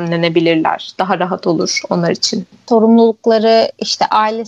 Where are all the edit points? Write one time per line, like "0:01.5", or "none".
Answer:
none